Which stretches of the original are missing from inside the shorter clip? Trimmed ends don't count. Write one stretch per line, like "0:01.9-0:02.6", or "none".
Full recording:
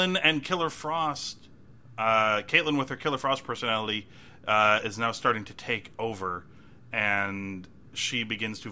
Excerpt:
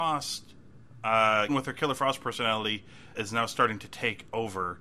0:02.4-0:02.7
0:04.4-0:04.8